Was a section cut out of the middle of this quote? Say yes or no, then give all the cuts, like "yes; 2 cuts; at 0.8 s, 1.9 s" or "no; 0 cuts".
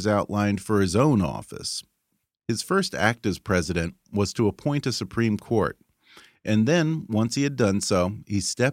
no; 0 cuts